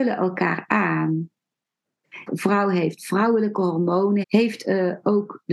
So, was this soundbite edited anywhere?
yes; 2 cuts; at 2.3 s, 4.2 s

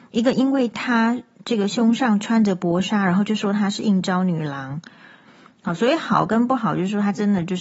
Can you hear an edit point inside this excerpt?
yes; 1 cut; at 5.2 s

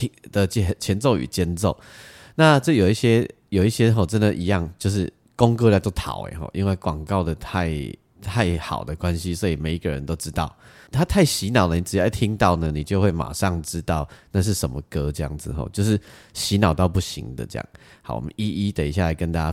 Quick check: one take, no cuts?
no; 1 cut; at 10.9 s

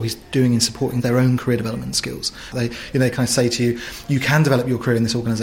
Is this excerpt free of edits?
no; 1 cut; at 2.5 s

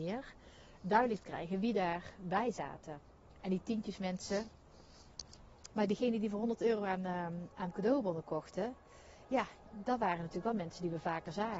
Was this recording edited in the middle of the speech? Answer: yes; 1 cut; at 5.7 s

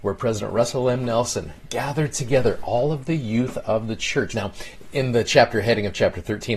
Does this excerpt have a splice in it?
yes; 1 cut; at 4.3 s

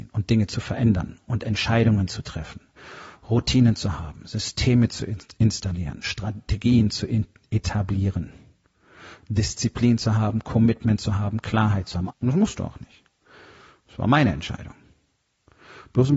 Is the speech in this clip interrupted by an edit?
yes; 1 cut; at 12.1 s

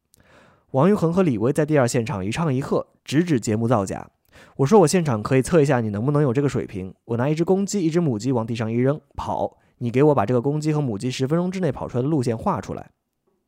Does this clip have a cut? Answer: no; 0 cuts

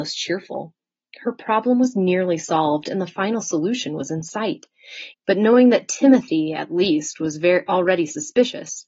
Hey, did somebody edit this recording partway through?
yes; 1 cut; at 5.1 s

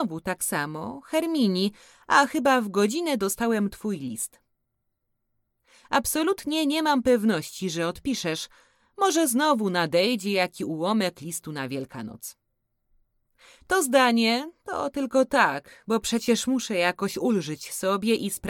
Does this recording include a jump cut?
no; 0 cuts

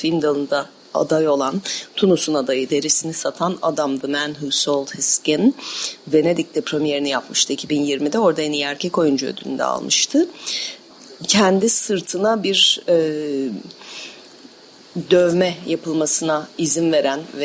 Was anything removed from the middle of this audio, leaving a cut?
yes; 1 cut; at 2.7 s

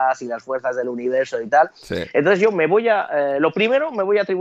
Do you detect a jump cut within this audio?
no; 0 cuts

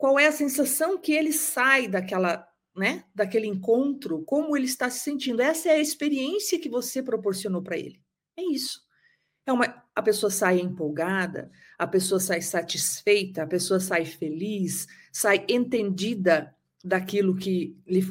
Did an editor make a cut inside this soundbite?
no; 0 cuts

